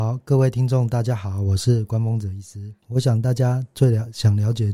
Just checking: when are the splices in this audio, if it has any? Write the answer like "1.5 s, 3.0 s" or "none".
2.8 s